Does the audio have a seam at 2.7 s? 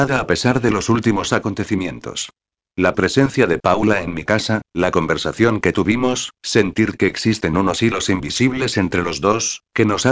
yes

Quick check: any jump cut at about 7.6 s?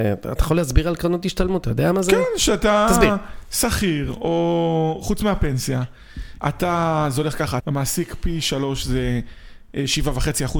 yes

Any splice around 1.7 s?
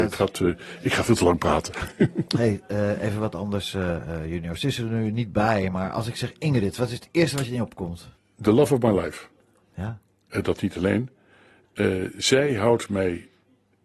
no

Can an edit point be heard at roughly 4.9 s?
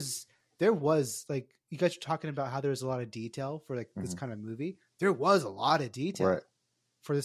no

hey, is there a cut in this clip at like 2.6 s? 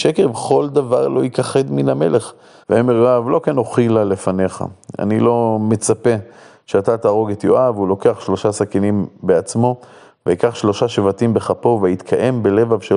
yes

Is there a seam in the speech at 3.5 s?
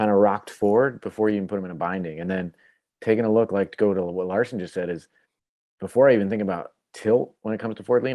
no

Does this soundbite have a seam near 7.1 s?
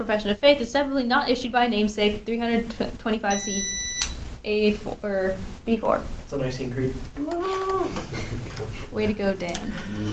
yes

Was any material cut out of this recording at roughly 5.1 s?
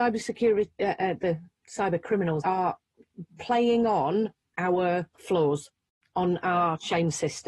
yes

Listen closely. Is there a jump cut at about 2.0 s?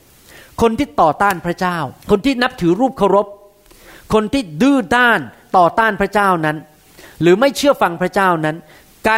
yes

